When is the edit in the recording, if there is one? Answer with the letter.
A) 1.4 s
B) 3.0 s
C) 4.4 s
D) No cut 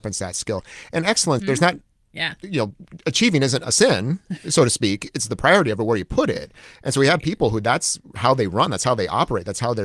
A